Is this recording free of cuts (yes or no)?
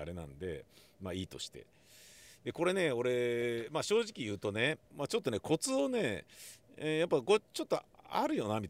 no